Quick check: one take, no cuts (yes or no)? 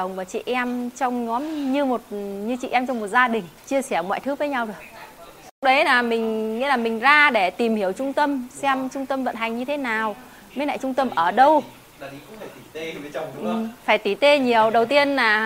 no